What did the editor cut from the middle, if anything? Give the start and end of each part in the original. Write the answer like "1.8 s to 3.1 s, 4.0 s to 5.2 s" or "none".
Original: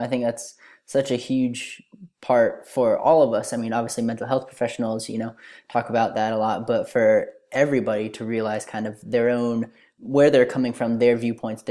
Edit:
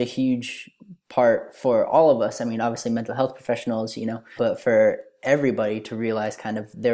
5.5 s to 6.7 s